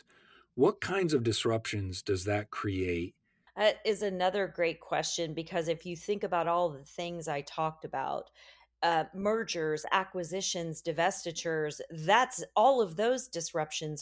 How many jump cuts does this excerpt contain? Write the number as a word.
one